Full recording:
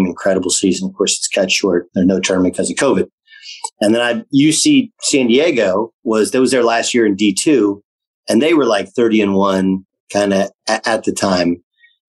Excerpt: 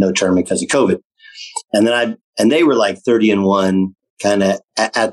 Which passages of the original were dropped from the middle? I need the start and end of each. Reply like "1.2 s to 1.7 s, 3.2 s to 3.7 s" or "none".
4.3 s to 8.1 s